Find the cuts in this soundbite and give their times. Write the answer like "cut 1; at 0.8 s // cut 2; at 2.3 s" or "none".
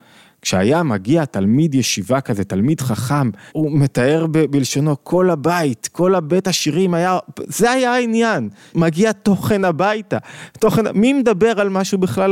cut 1; at 3.5 s // cut 2; at 8.7 s